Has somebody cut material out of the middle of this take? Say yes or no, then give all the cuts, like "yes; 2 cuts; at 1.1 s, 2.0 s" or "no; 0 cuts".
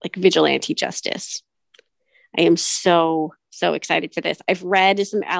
no; 0 cuts